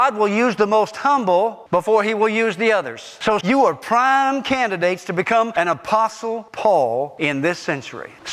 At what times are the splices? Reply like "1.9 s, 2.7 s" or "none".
3.4 s